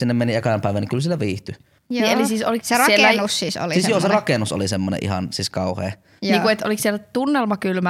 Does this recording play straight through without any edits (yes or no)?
no